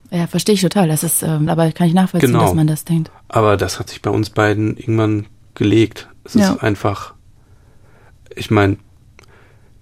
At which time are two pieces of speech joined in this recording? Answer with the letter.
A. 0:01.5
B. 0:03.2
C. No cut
A